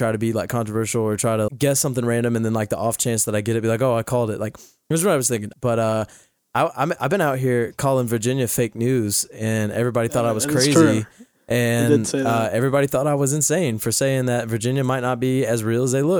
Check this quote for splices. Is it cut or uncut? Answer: cut